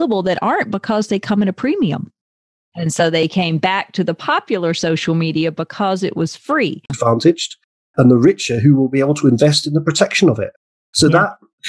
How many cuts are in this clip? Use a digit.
2